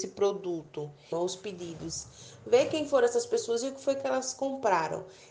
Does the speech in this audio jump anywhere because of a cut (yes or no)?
yes